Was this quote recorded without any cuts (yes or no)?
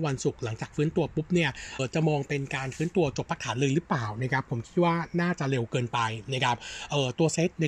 no